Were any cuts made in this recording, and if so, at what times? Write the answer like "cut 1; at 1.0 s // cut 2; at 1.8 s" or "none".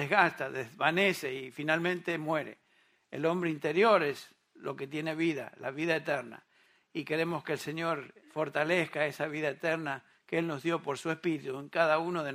cut 1; at 8.2 s